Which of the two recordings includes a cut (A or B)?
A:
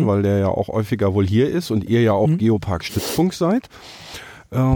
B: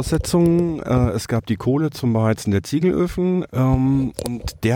B